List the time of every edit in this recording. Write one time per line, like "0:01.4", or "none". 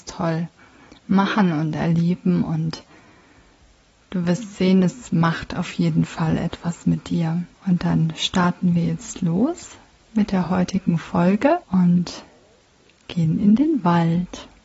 0:07.5
0:11.6